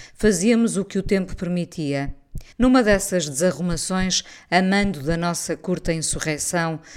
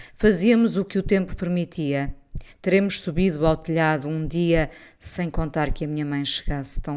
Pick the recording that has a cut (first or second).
first